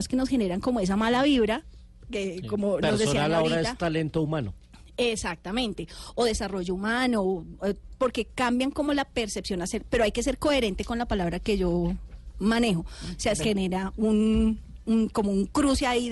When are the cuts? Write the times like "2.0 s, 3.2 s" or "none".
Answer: 13.4 s

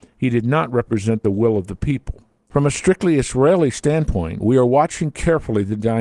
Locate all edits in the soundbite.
2.5 s, 4.4 s

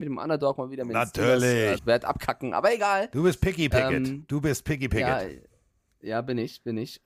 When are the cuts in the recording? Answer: 1.8 s

